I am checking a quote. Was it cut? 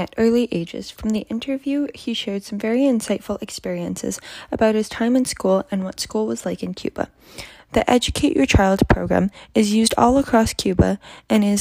yes; 1 cut; at 7.6 s

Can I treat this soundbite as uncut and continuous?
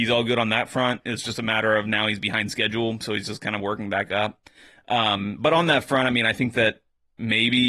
yes; 0 cuts

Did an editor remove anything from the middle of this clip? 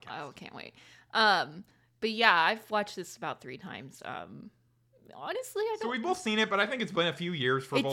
no; 0 cuts

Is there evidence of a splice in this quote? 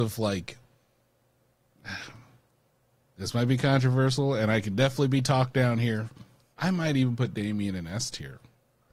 yes; 1 cut; at 6.5 s

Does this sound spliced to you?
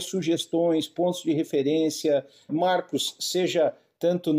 yes; 1 cut; at 2.5 s

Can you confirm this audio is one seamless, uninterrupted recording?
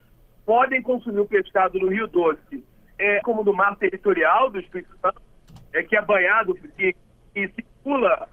no; 1 cut; at 3.2 s

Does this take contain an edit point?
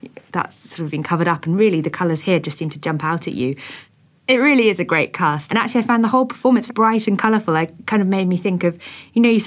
yes; 2 cuts; at 5.5 s, 6.7 s

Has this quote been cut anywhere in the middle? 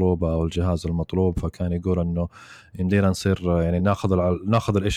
no; 0 cuts

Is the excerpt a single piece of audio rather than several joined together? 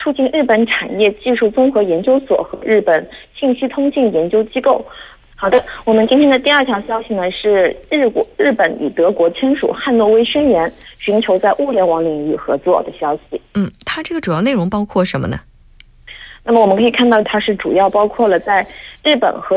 no; 2 cuts; at 5.3 s, 17.2 s

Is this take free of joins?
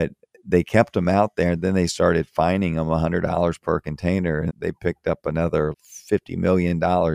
no; 2 cuts; at 4.5 s, 5.7 s

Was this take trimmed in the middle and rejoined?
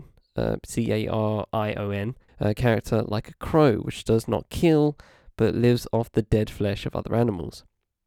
yes; 1 cut; at 2.3 s

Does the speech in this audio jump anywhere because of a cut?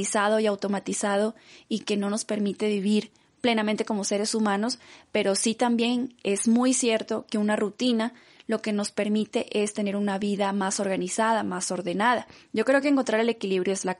no; 0 cuts

